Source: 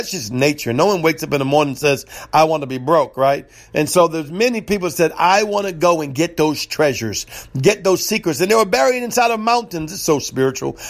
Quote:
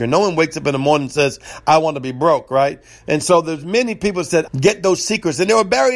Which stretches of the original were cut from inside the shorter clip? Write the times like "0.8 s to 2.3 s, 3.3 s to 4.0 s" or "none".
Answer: 5.1 s to 7.5 s